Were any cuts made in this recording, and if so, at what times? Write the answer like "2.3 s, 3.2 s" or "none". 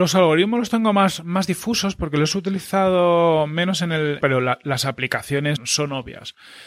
4.2 s, 5.6 s